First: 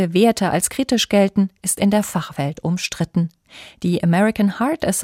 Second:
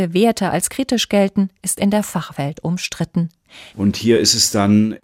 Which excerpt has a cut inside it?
second; 1 cut; at 3.7 s

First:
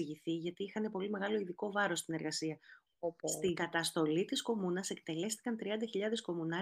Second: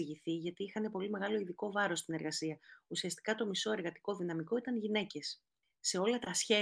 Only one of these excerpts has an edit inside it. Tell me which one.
first; 1 cut; at 2.9 s

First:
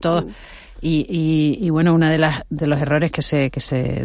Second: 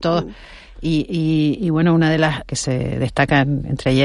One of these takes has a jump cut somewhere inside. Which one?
second; 1 cut; at 2.5 s

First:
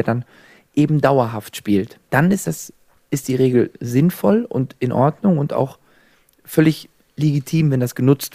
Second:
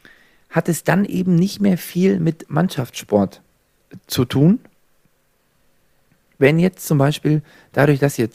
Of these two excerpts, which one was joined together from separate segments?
first; 1 cut; at 2.1 s

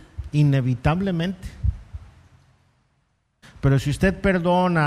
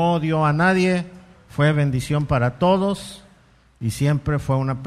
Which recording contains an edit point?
first; 1 cut; at 3.4 s

